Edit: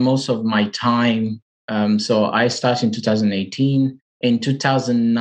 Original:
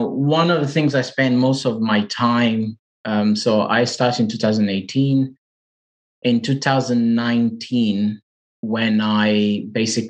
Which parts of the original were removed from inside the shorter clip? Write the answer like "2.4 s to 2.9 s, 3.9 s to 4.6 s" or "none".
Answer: 5.4 s to 6.1 s